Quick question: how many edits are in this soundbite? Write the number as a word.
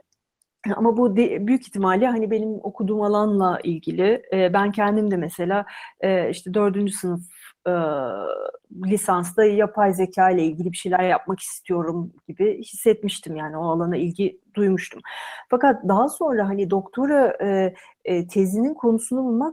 zero